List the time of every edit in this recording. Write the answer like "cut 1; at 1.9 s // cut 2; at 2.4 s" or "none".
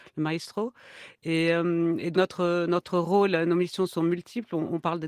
cut 1; at 2.1 s